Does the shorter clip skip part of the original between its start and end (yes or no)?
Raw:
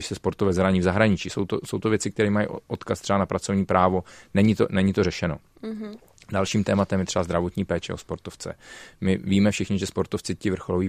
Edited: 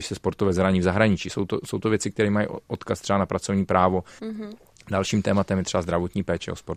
yes